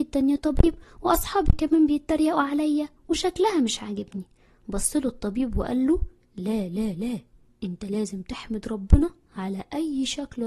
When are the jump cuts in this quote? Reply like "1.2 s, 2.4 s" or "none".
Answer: none